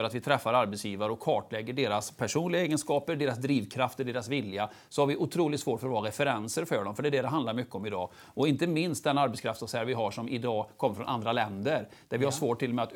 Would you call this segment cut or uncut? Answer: uncut